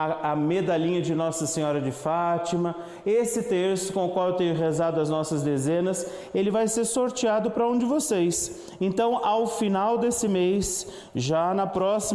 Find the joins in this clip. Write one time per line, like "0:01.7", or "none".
none